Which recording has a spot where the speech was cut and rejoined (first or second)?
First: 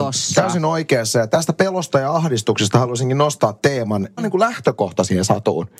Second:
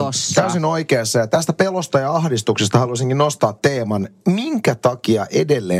first